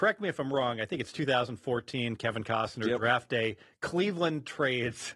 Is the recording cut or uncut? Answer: uncut